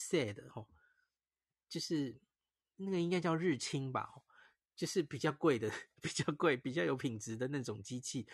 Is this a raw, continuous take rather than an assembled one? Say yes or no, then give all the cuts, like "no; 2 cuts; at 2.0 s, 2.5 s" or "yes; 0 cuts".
yes; 0 cuts